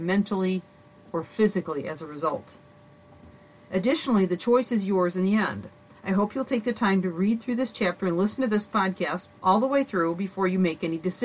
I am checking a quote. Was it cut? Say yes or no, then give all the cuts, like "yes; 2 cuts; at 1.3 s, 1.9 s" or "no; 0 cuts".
yes; 2 cuts; at 3.6 s, 9.4 s